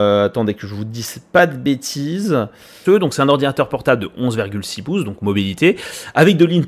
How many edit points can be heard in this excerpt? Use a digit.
1